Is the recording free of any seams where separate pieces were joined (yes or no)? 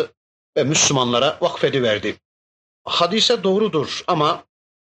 no